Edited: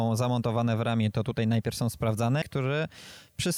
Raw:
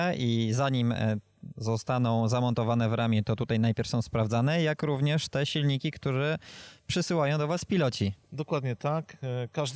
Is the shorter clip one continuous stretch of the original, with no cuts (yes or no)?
no